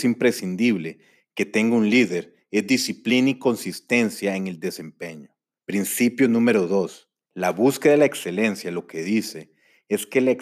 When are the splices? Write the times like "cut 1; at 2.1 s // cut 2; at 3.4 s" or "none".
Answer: cut 1; at 5.6 s // cut 2; at 7.3 s